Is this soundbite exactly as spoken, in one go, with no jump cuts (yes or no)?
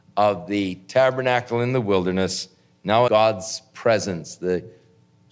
no